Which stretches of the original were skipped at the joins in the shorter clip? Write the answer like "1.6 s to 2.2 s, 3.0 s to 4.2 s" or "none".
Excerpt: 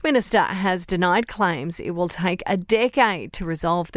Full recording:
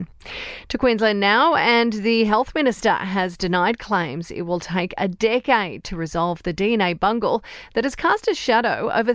none